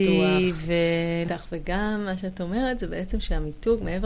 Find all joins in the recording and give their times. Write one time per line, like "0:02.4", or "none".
0:01.2